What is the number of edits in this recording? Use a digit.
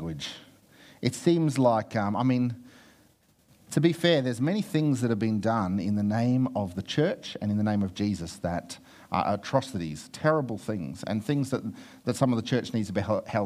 0